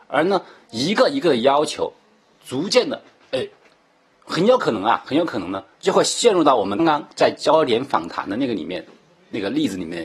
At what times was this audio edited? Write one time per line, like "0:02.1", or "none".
0:05.7
0:06.8